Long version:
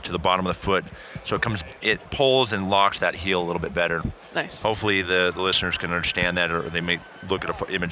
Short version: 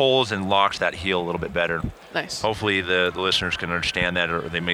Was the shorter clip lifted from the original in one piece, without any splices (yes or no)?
yes